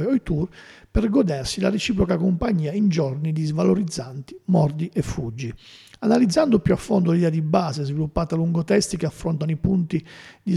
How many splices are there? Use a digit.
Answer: 0